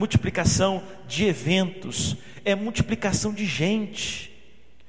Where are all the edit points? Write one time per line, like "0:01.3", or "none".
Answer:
none